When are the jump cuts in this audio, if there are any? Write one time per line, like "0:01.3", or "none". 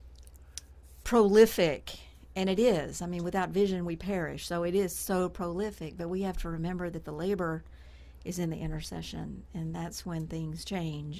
0:01.0